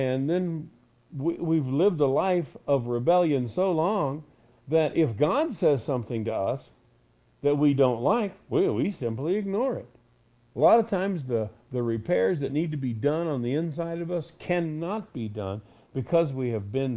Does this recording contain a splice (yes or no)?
yes